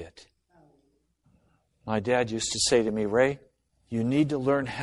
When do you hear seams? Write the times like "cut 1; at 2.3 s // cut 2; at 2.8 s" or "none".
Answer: none

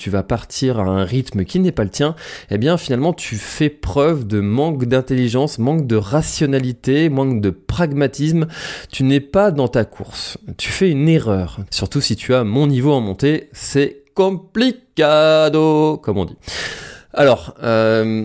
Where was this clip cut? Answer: cut 1; at 11.7 s

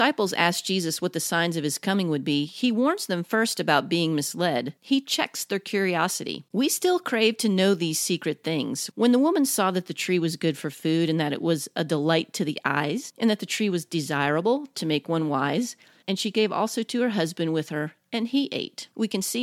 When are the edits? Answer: cut 1; at 8.9 s // cut 2; at 16.0 s

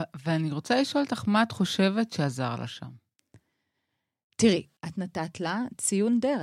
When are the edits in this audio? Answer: cut 1; at 4.8 s

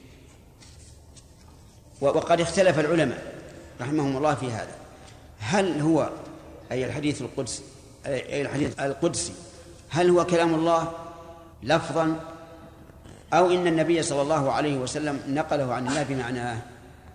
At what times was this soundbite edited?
cut 1; at 8.7 s // cut 2; at 11.5 s

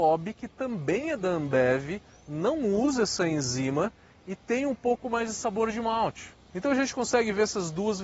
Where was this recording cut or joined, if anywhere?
cut 1; at 6.5 s

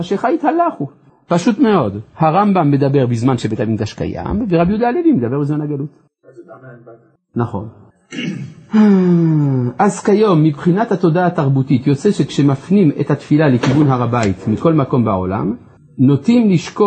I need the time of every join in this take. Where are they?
none

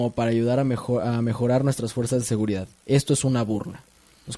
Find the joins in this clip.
none

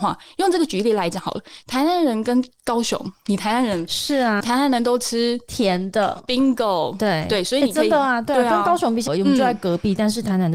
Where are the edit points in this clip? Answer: cut 1; at 4.4 s // cut 2; at 9.1 s

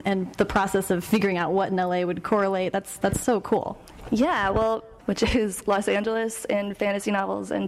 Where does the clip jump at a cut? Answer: cut 1; at 5.0 s

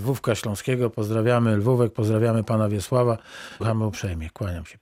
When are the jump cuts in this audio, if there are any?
cut 1; at 3.6 s

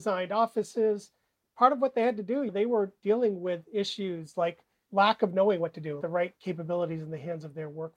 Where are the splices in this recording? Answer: cut 1; at 6.0 s

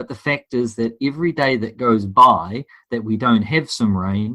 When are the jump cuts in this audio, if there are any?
none

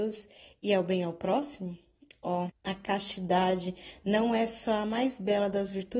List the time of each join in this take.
cut 1; at 2.5 s

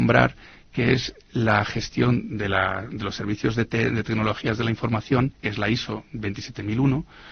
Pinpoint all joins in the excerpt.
none

